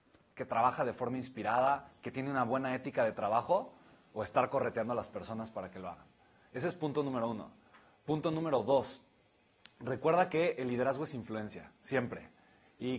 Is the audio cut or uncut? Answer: cut